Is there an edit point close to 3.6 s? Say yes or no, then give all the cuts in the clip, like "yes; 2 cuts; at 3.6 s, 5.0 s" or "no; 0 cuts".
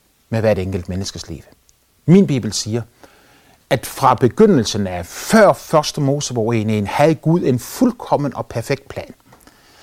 no; 1 cut; at 1.9 s